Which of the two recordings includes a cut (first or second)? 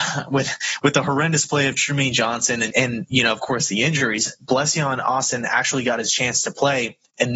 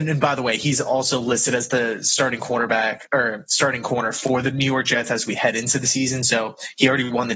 first